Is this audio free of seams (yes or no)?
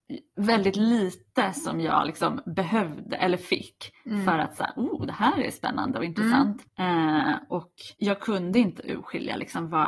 no